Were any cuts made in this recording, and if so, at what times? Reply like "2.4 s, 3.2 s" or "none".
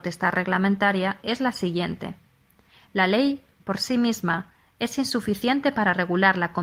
none